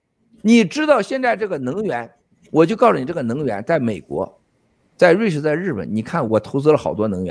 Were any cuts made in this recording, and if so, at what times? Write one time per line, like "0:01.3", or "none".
0:06.3